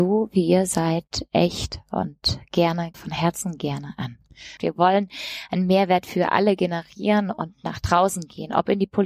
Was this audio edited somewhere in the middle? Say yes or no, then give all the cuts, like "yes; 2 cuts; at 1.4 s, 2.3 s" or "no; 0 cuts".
yes; 2 cuts; at 2.9 s, 4.6 s